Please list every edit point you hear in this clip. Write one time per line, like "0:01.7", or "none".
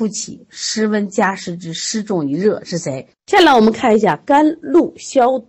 0:03.1